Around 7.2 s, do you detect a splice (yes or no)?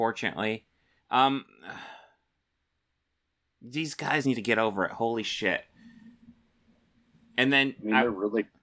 no